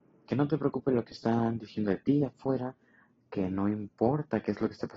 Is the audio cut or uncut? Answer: uncut